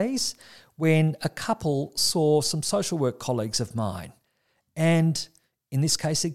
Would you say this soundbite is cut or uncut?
uncut